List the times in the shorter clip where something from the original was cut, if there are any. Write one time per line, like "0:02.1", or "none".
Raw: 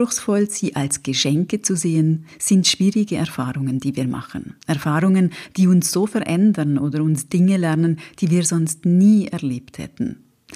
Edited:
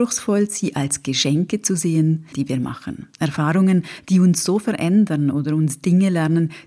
0:02.3